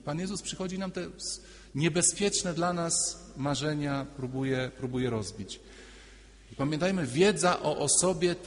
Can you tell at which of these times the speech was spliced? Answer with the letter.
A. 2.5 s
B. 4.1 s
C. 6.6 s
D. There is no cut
C